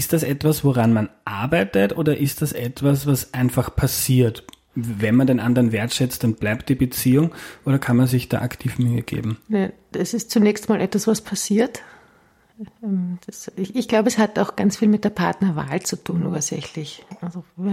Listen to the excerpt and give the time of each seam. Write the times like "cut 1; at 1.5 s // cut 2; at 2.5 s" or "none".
none

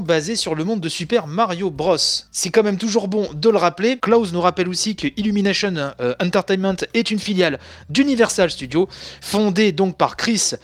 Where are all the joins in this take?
none

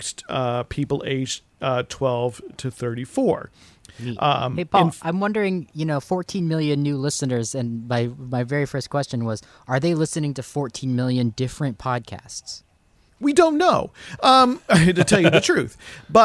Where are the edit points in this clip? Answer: none

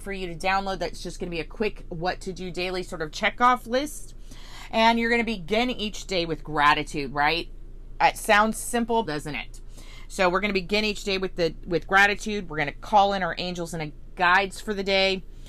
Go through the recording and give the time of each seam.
cut 1; at 9.1 s

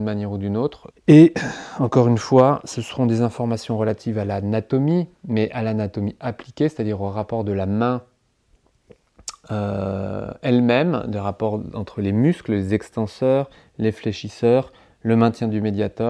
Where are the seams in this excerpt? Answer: cut 1; at 0.9 s

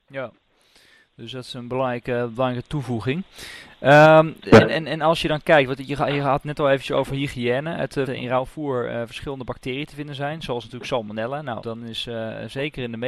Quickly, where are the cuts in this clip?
cut 1; at 8.1 s // cut 2; at 11.6 s

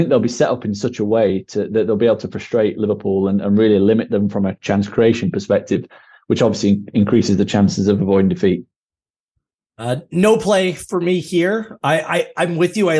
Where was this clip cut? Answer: none

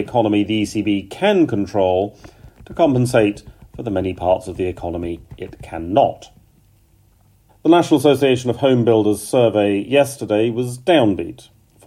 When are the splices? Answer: cut 1; at 7.5 s

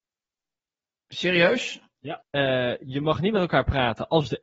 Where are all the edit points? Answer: cut 1; at 2.2 s

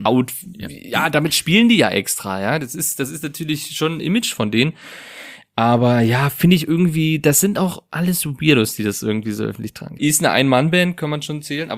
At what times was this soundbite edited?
cut 1; at 10.0 s

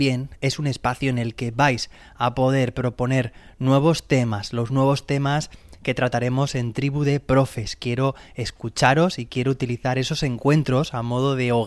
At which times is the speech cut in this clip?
none

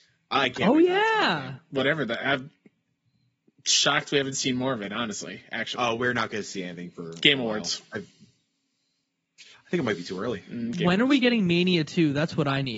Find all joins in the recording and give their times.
none

